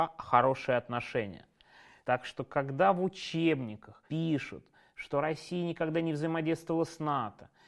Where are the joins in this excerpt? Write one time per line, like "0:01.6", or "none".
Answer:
0:02.0
0:04.1